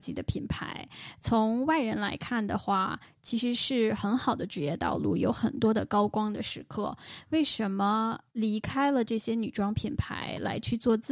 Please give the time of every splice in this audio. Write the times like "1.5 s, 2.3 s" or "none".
8.3 s